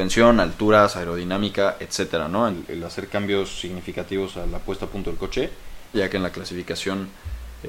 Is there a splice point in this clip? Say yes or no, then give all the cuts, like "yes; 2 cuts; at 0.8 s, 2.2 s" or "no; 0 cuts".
yes; 2 cuts; at 2.5 s, 5.9 s